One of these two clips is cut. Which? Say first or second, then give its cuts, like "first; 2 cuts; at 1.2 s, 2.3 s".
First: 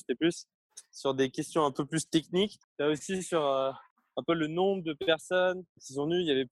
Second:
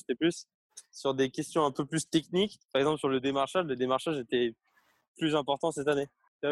first; 1 cut; at 2.6 s